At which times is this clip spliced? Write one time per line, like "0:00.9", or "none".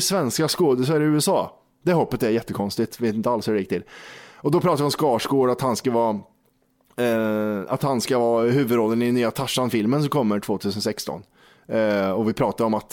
none

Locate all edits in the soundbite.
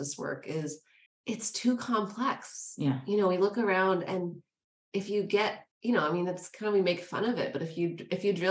0:01.1
0:05.7

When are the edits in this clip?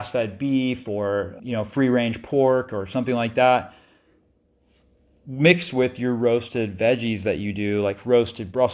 0:01.4

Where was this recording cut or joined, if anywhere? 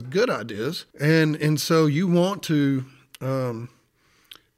0:00.9

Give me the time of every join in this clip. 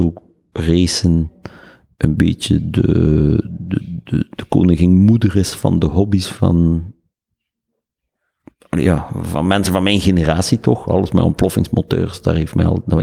none

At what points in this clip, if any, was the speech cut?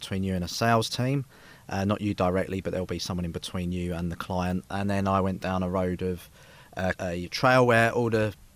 0:04.7
0:06.9

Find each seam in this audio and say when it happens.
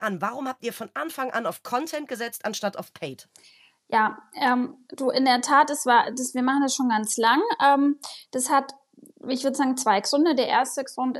none

